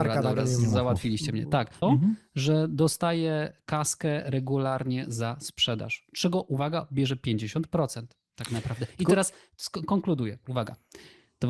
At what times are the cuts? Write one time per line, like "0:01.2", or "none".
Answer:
0:01.8